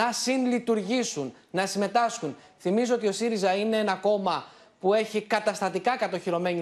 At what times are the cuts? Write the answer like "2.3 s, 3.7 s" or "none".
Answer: none